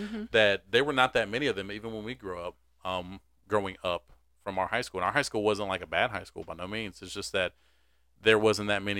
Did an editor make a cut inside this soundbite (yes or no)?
no